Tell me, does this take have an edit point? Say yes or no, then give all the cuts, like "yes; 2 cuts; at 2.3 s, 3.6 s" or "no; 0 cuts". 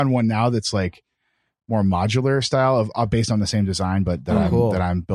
no; 0 cuts